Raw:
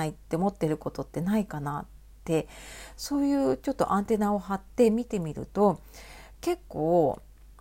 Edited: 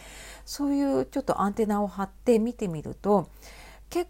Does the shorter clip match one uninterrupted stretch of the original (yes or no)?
yes